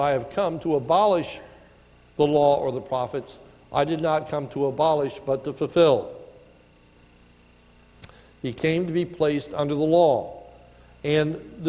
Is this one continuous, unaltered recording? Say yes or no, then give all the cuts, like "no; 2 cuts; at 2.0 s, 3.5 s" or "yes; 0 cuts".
yes; 0 cuts